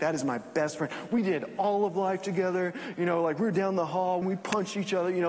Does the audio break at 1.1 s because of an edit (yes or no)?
no